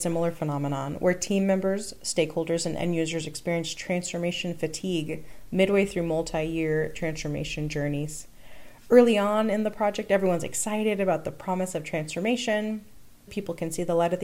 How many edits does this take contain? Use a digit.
1